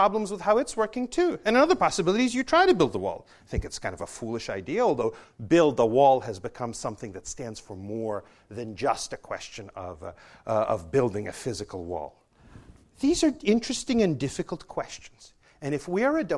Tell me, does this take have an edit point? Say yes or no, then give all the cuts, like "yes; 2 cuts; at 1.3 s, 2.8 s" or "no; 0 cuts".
no; 0 cuts